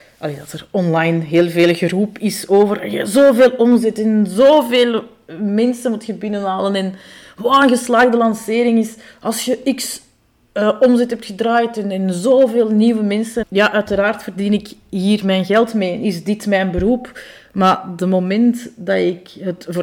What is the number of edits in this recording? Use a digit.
1